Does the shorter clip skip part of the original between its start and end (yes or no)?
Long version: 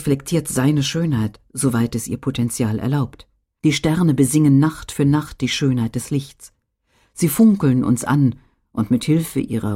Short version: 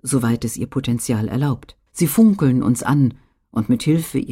yes